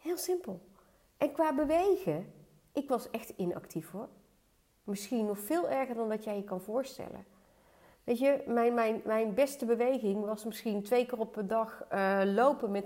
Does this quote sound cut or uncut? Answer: uncut